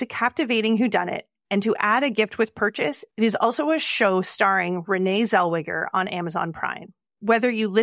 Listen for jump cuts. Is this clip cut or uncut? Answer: uncut